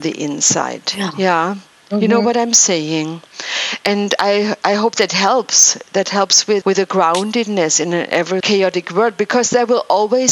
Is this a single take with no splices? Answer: no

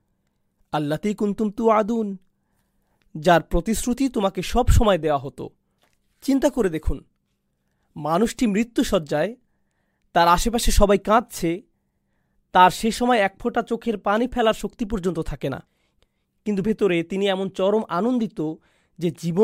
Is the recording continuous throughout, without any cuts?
no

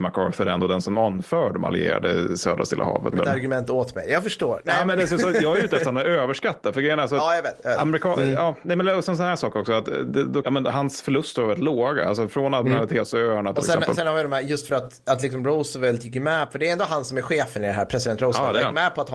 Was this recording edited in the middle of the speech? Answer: yes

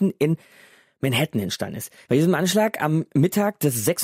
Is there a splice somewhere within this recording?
yes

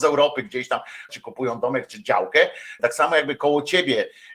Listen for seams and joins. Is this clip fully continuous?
no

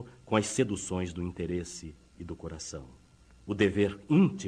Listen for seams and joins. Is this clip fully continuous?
no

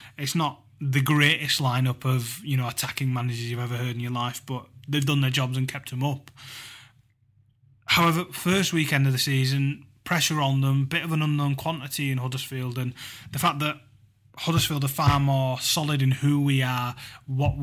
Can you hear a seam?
no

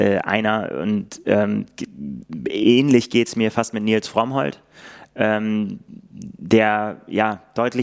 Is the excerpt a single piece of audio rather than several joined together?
yes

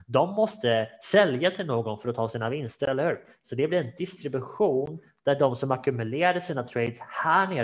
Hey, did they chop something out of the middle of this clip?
no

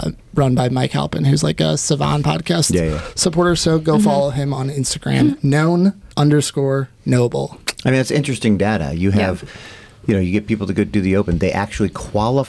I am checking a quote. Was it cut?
yes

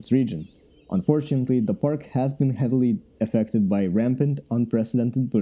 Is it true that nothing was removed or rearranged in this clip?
yes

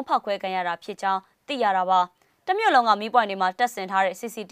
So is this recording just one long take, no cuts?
yes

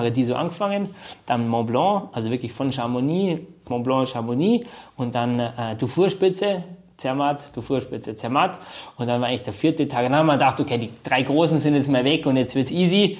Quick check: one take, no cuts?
yes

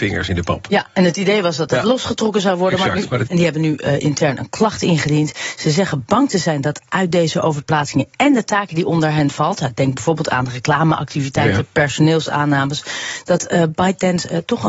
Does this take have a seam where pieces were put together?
yes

